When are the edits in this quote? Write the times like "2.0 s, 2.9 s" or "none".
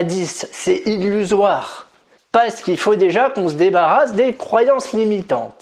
2.2 s